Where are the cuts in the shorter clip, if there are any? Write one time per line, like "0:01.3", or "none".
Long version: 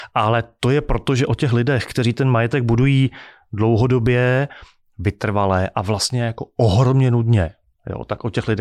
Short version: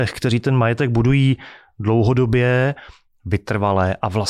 none